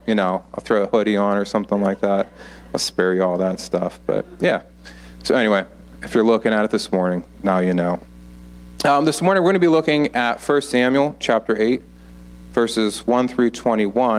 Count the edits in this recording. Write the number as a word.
zero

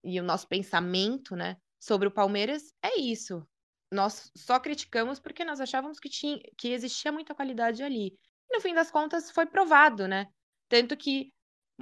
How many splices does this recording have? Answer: zero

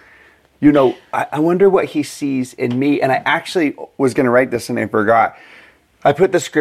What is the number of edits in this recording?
zero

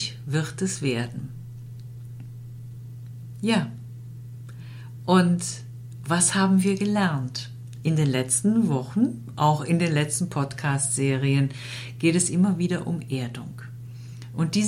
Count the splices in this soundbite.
zero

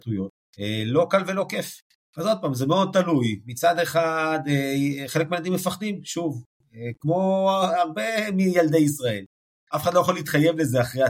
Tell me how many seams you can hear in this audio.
two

